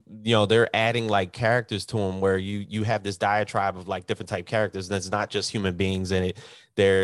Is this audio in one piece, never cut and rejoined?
yes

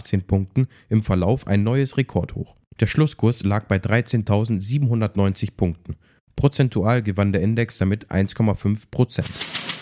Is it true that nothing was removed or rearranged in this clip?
no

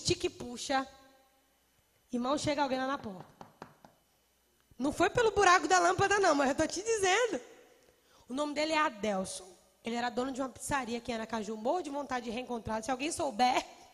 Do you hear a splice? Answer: no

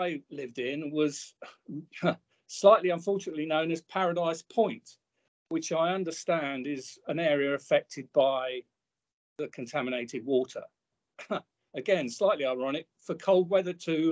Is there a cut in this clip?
yes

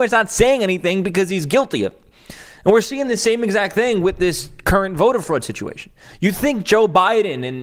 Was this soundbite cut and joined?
no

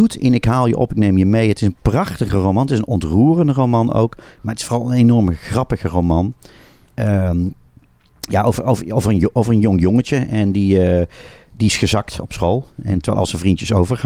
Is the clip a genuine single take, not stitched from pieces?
no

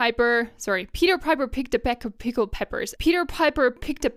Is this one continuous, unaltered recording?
no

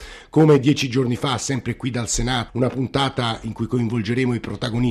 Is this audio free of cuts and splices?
no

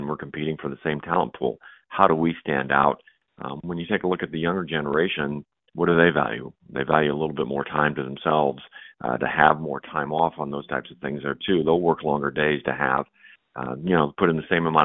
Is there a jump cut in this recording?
no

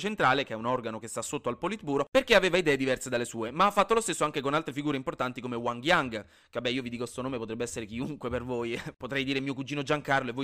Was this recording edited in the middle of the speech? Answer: no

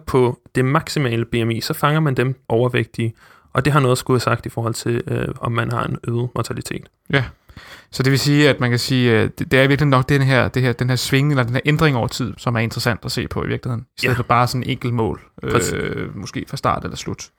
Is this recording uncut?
no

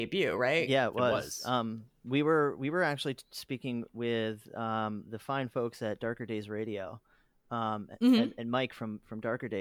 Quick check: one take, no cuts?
yes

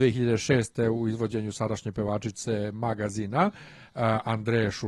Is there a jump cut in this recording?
no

